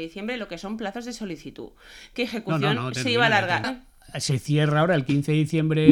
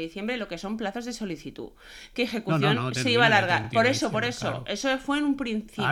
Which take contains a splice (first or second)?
first